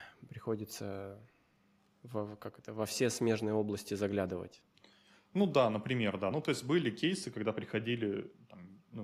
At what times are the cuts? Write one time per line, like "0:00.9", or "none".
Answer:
none